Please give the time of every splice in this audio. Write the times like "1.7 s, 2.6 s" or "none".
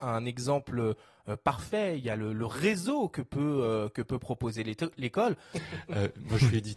5.5 s